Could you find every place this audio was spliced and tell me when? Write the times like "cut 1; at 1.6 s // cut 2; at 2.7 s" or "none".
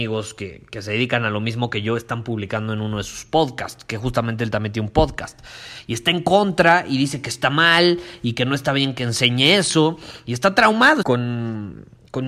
cut 1; at 11.0 s

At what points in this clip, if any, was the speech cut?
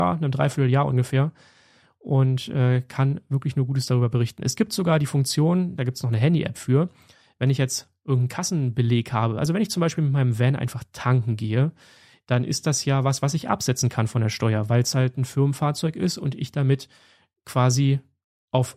none

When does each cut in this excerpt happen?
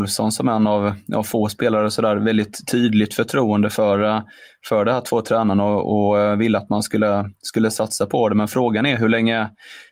none

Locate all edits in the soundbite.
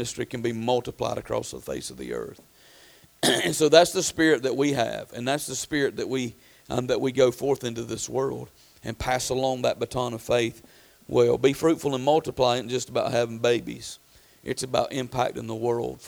none

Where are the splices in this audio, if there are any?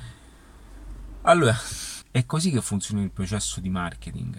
cut 1; at 2.0 s

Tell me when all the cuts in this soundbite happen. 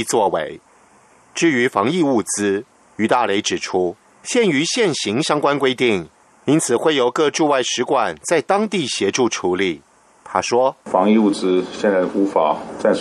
none

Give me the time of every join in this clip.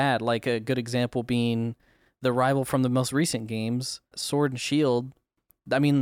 cut 1; at 4.1 s

